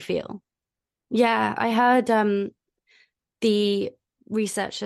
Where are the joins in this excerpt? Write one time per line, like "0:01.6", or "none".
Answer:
0:01.0